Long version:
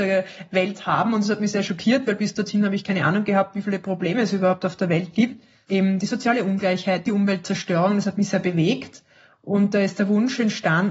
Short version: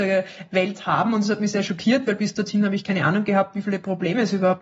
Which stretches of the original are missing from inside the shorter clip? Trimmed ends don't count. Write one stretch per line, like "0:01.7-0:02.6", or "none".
none